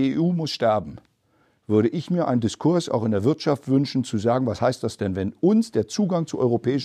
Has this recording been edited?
no; 0 cuts

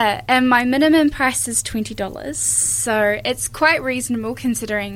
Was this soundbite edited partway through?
no; 0 cuts

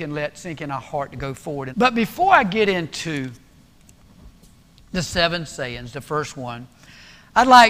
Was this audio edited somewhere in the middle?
yes; 1 cut; at 1.7 s

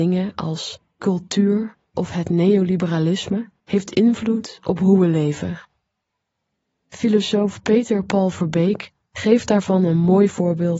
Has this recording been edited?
yes; 1 cut; at 3.6 s

